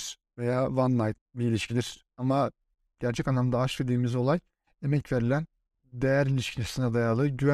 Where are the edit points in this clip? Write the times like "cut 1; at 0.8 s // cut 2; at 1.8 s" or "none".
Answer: cut 1; at 2.1 s